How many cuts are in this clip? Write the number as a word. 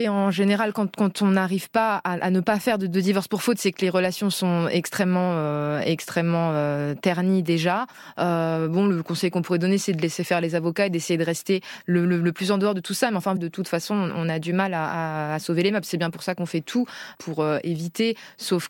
two